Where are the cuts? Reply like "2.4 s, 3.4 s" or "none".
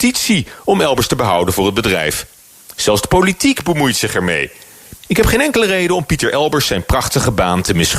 5.0 s